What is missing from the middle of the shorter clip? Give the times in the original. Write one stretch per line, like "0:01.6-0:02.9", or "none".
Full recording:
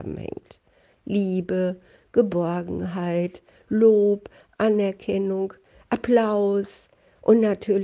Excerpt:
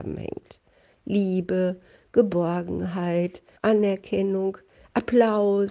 0:03.6-0:04.5